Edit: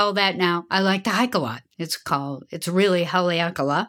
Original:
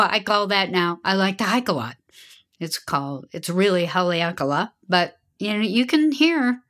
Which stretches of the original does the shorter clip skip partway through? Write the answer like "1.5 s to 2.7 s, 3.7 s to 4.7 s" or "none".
2.0 s to 2.5 s